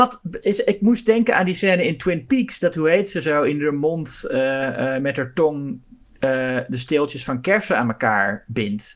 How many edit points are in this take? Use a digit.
0